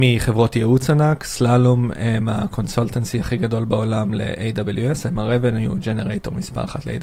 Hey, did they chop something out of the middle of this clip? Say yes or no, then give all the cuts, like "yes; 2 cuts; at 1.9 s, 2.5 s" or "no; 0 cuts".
no; 0 cuts